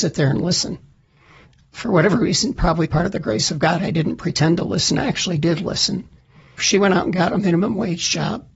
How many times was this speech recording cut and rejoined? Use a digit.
1